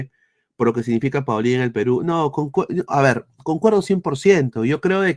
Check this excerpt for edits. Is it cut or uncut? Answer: uncut